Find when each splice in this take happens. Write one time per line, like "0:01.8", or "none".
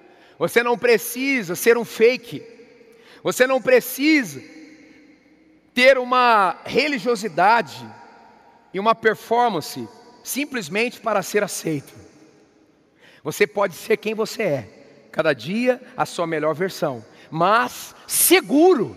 none